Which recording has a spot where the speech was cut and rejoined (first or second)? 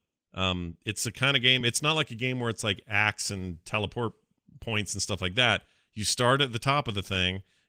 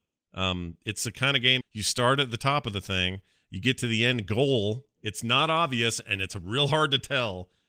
second